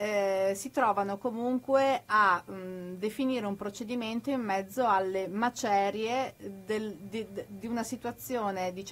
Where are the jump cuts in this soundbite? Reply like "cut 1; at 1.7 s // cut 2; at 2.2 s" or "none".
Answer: none